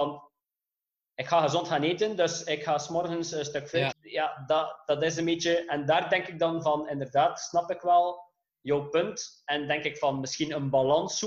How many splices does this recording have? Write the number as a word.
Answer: one